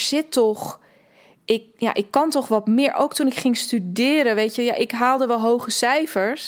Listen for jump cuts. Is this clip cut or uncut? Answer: uncut